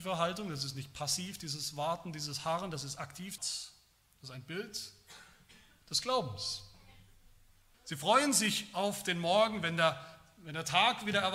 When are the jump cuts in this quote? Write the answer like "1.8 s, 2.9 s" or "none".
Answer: 3.4 s, 7.7 s